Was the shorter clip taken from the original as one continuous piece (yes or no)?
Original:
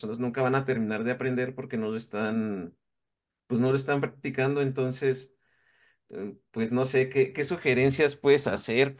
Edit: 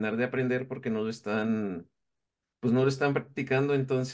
yes